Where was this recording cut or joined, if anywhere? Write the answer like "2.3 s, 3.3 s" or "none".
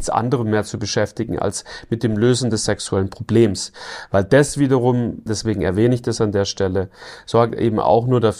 5.3 s